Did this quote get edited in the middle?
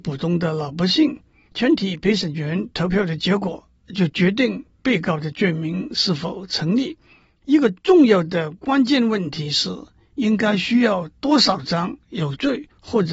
yes; 1 cut; at 1.5 s

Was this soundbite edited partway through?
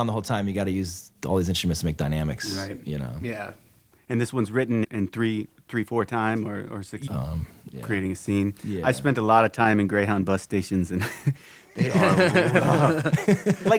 yes; 2 cuts; at 4.8 s, 7.1 s

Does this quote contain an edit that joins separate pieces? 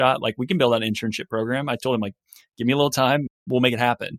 no; 0 cuts

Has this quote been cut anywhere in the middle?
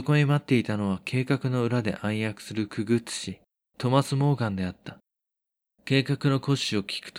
yes; 1 cut; at 5.8 s

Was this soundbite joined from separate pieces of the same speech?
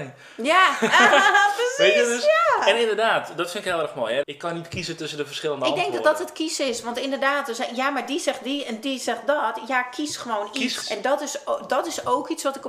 yes; 3 cuts; at 1.1 s, 4.2 s, 10.8 s

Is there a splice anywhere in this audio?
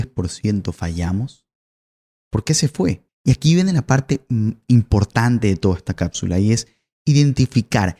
yes; 1 cut; at 3.1 s

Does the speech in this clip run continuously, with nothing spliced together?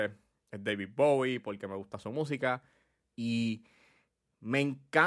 no; 1 cut; at 3.1 s

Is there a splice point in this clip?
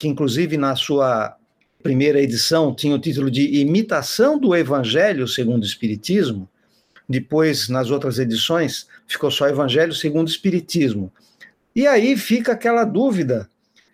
yes; 2 cuts; at 9.0 s, 11.5 s

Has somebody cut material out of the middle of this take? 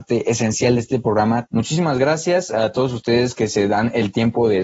yes; 1 cut; at 1.5 s

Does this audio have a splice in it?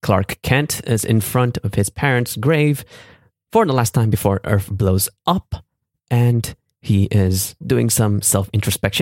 yes; 1 cut; at 7.6 s

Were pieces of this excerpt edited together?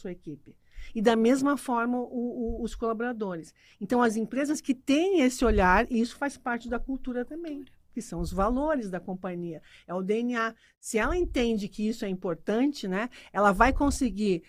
no; 0 cuts

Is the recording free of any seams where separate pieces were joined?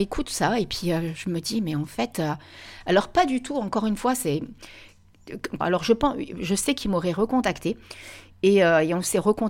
no; 1 cut; at 5.6 s

